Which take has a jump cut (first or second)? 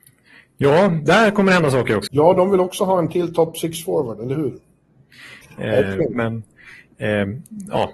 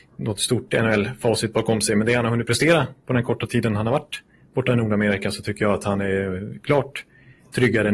first